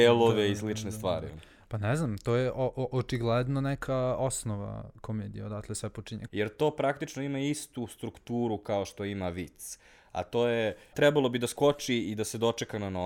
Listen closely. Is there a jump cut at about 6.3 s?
yes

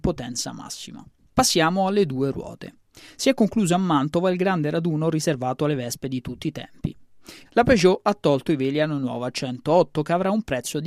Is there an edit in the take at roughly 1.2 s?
no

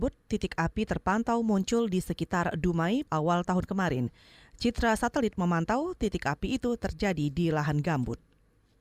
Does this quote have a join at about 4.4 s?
no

